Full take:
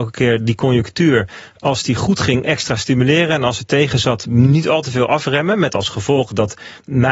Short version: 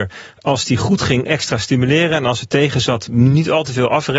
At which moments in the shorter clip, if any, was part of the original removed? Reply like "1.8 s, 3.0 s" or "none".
none